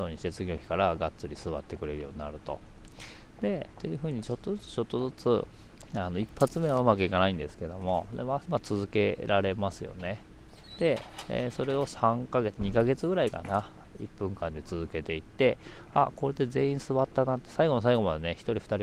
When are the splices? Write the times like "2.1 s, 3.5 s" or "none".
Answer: 8.5 s